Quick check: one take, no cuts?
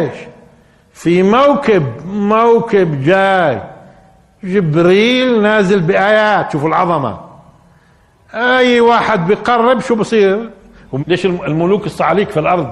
no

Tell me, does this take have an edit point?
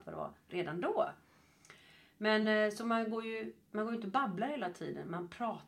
no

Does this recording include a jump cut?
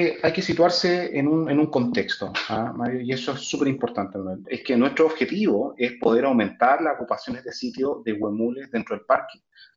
yes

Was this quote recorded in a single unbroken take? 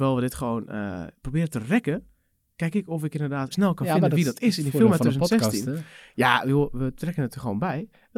no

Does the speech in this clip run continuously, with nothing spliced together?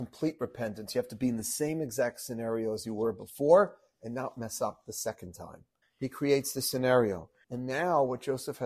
no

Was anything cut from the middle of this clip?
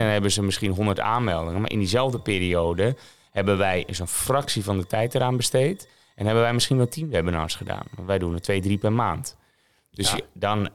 no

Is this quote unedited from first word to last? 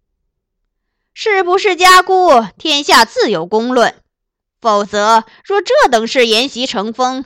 no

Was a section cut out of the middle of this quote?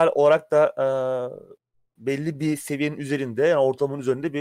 no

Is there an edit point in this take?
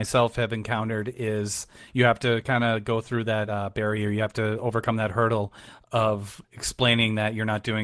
no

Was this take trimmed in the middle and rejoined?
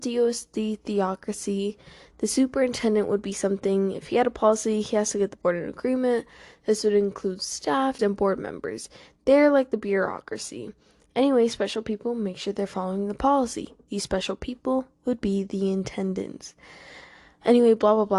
yes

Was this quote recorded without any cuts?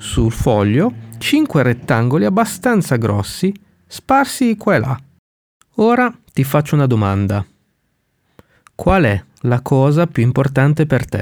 yes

